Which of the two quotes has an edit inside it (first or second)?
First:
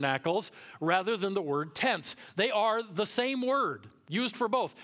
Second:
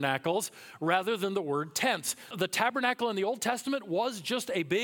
second